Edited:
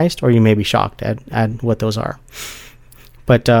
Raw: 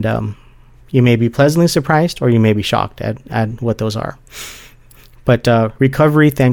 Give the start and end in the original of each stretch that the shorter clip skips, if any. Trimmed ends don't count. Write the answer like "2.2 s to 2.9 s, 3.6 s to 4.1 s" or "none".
none